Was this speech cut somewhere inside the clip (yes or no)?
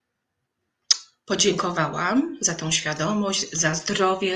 no